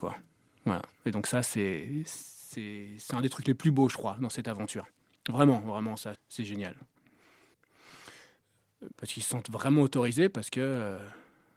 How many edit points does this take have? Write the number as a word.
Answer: two